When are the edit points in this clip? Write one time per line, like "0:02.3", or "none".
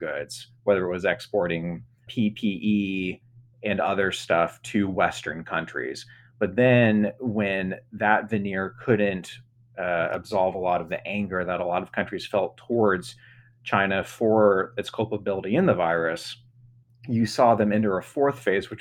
0:02.1

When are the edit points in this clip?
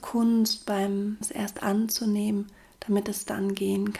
0:01.2

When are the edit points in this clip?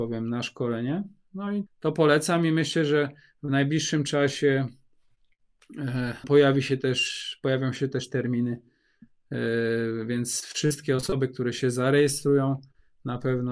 0:01.7
0:06.2

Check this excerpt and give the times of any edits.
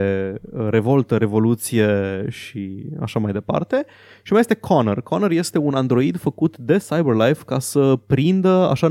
none

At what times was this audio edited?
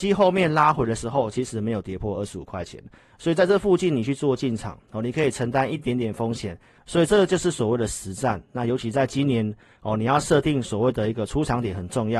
none

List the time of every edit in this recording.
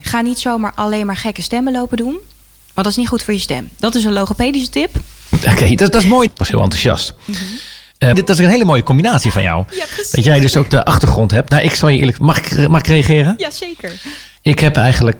0:06.3
0:08.1

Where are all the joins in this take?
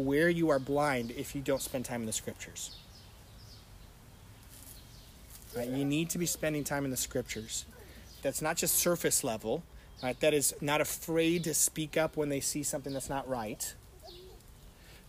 0:08.2
0:10.0

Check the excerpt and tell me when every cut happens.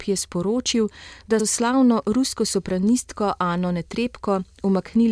0:01.4

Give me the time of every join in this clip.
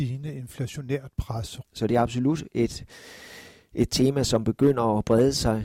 0:01.6

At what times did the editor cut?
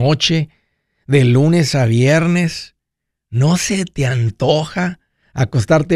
none

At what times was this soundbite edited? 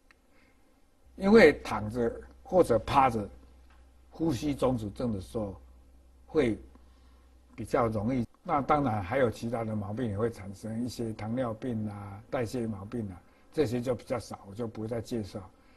0:01.1
0:08.2

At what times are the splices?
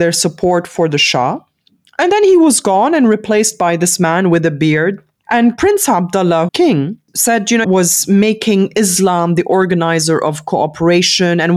0:05.2
0:06.5
0:07.6

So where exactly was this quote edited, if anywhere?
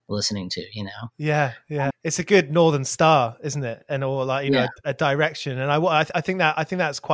0:01.9

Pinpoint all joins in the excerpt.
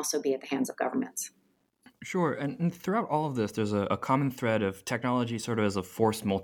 none

